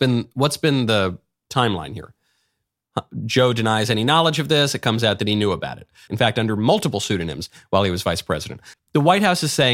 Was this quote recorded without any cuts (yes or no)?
no